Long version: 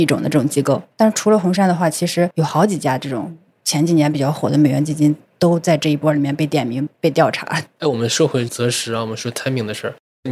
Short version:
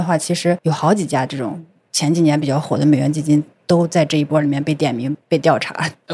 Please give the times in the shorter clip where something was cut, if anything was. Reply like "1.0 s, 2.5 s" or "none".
none